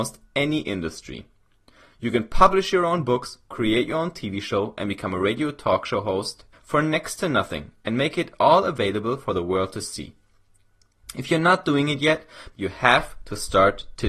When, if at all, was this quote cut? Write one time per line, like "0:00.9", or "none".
0:06.5
0:12.5